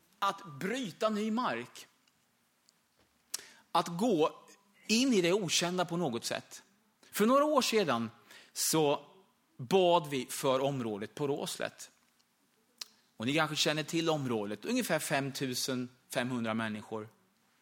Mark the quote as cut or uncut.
cut